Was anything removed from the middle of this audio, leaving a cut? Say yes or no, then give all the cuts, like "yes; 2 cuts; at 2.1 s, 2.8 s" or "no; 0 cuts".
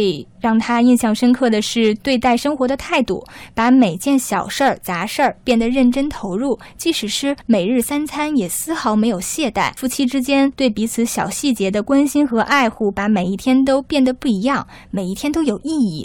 no; 0 cuts